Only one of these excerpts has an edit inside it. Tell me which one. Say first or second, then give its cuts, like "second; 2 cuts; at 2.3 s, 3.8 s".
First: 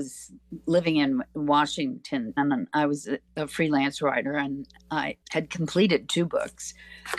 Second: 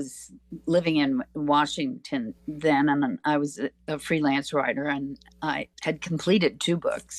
first; 1 cut; at 2.4 s